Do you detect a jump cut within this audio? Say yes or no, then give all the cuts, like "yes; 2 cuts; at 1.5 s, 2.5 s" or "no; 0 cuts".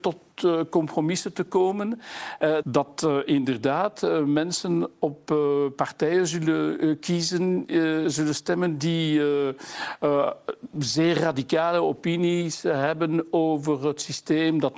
yes; 1 cut; at 2.6 s